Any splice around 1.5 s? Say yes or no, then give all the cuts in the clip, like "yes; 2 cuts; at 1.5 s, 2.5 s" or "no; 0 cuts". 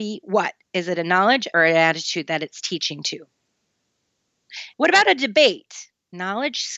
yes; 2 cuts; at 1.5 s, 4.7 s